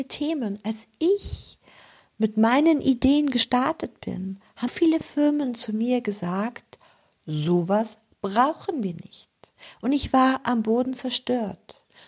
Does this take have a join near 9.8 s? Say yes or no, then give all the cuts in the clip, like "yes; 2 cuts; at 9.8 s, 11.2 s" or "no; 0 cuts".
no; 1 cut; at 4.7 s